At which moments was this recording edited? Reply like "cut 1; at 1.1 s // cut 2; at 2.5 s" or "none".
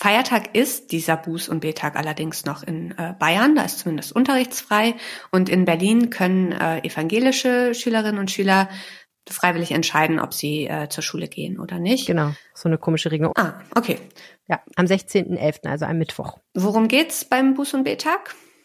cut 1; at 13.3 s